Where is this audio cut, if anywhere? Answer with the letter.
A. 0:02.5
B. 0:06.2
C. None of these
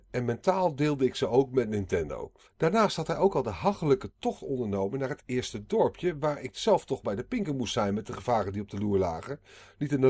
A